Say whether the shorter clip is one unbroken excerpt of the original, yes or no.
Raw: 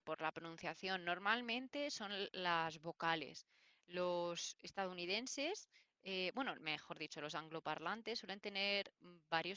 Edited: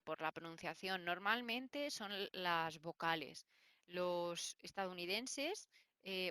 yes